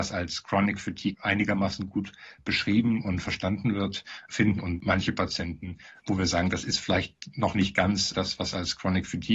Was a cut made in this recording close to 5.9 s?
no; 1 cut; at 1.1 s

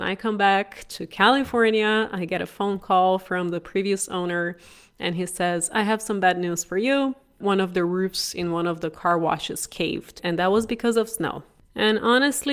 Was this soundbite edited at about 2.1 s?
no; 0 cuts

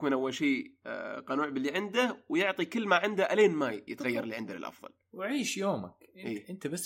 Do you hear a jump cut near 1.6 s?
no; 1 cut; at 3.9 s

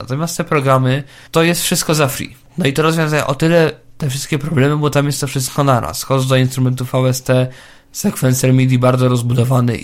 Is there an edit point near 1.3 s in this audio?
yes; 2 cuts; at 1.3 s, 2.4 s

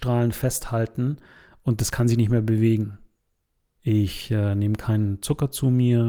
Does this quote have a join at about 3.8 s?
yes; 1 cut; at 3.8 s

